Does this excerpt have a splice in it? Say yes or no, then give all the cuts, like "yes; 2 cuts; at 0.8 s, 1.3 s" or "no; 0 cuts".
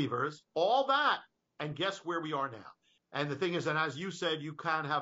yes; 1 cut; at 3.0 s